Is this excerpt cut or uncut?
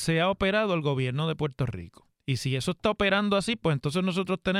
cut